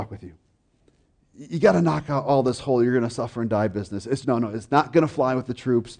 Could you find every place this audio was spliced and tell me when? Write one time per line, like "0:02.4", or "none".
0:04.2